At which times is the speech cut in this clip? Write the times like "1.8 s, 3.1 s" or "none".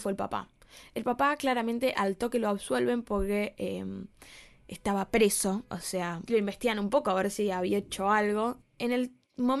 6.3 s, 8.6 s